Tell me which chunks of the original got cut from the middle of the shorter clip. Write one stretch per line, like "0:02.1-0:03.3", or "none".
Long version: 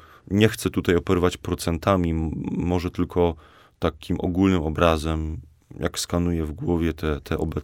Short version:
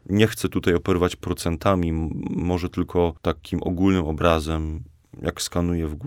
0:03.4-0:03.7